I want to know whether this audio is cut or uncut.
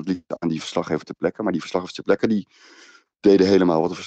uncut